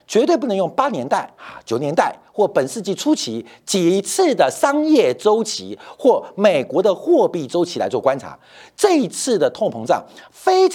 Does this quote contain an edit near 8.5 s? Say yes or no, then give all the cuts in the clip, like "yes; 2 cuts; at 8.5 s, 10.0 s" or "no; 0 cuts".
no; 0 cuts